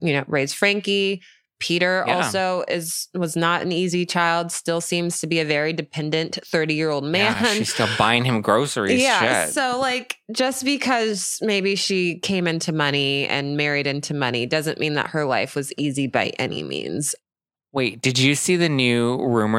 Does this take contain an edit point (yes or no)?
no